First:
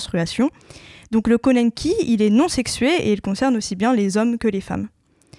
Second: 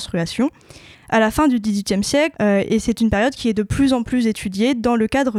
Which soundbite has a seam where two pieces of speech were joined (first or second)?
second